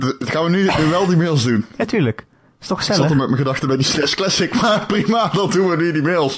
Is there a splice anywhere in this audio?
no; 0 cuts

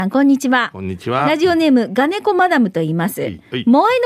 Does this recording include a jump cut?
no; 0 cuts

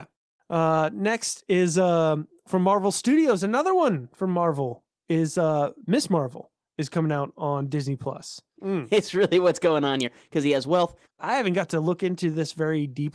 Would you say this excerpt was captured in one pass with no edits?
no; 2 cuts; at 8.6 s, 11.1 s

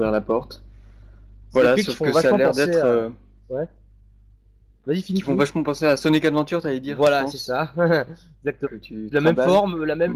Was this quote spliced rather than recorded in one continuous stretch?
yes; 1 cut; at 8.6 s

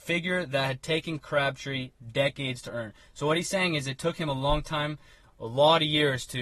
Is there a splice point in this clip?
no; 0 cuts

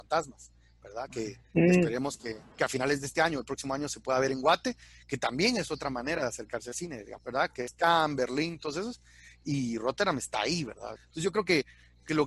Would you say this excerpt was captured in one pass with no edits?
no; 3 cuts; at 2.5 s, 7.2 s, 10.9 s

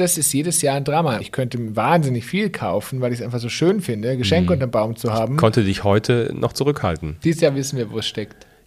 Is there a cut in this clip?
yes; 2 cuts; at 1.2 s, 7.2 s

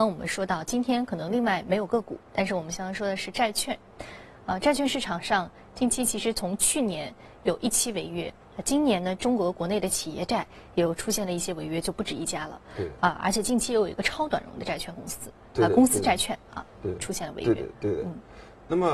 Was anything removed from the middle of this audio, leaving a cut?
no; 0 cuts

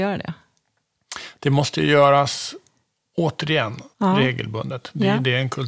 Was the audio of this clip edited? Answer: yes; 1 cut; at 3.9 s

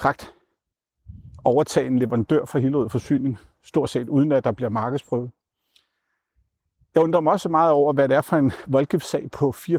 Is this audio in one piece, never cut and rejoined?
yes; 0 cuts

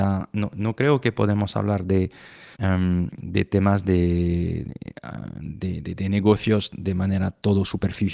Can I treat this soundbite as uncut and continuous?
no; 2 cuts; at 2.5 s, 5.8 s

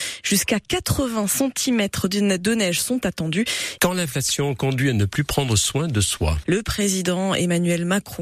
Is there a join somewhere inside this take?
yes; 2 cuts; at 3.8 s, 6.4 s

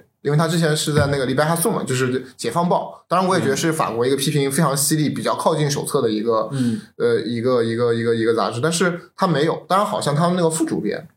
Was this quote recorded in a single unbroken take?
yes; 0 cuts

